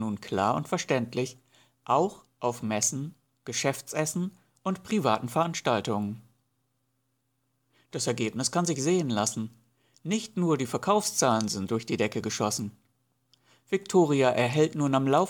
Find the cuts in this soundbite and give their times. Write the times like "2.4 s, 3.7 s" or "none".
none